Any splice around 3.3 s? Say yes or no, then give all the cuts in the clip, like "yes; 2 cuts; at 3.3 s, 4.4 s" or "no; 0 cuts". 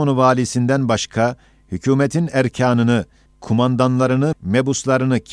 yes; 2 cuts; at 3.3 s, 4.3 s